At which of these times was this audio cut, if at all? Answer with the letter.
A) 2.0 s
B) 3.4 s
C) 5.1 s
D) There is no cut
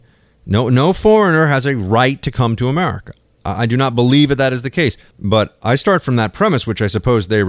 C